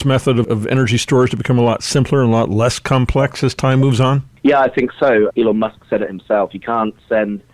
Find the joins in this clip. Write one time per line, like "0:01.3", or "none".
0:05.3